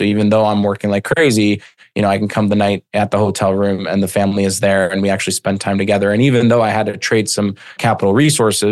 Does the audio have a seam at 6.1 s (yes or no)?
no